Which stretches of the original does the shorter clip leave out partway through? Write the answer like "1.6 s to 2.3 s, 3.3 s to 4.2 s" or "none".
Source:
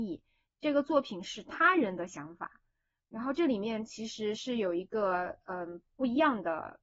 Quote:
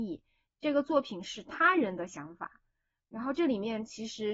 none